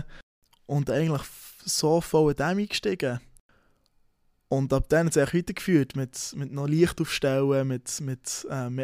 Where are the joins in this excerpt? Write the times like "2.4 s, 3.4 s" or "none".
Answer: none